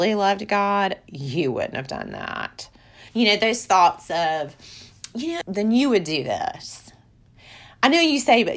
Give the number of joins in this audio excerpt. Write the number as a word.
two